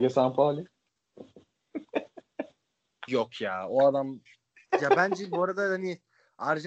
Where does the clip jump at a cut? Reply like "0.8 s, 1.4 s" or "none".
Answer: none